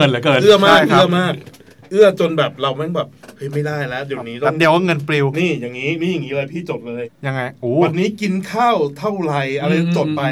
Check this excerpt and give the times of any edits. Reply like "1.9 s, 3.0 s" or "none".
7.0 s

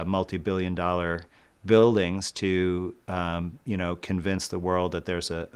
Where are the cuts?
none

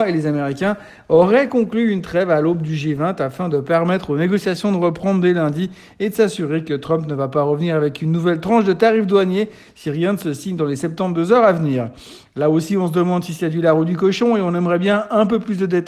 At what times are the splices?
none

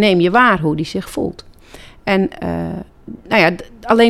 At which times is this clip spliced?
none

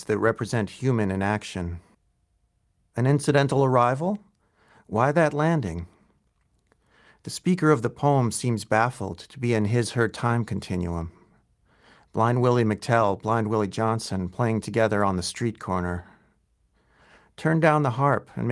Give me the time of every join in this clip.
none

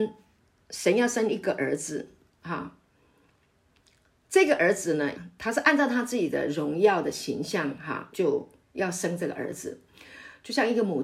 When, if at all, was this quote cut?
5.1 s, 8.1 s

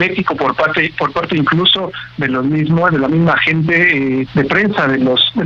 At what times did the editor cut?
4.3 s

